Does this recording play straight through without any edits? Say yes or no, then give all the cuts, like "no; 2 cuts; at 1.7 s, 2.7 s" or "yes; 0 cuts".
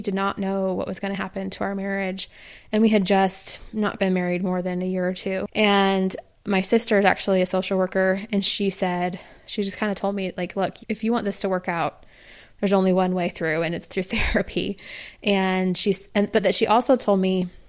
no; 1 cut; at 10.8 s